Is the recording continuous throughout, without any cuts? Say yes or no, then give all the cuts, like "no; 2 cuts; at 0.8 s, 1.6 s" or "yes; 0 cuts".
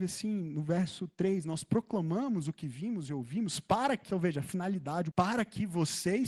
no; 2 cuts; at 4.1 s, 5.1 s